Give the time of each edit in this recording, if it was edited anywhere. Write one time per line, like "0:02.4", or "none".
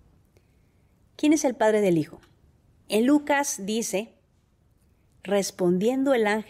0:02.8